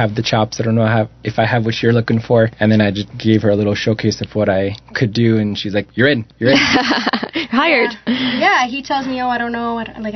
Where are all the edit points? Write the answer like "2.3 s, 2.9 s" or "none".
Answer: none